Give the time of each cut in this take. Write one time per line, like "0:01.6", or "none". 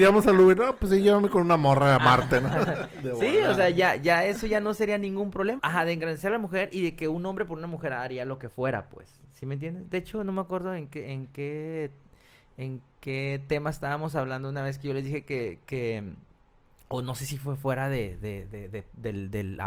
0:05.6